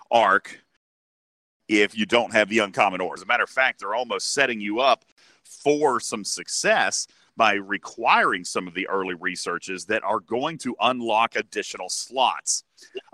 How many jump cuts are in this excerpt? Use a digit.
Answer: 1